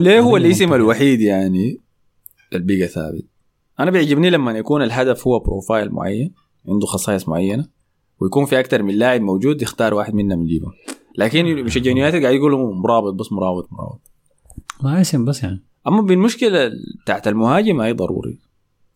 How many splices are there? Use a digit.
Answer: 1